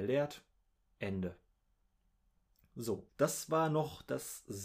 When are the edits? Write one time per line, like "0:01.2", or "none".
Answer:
0:03.1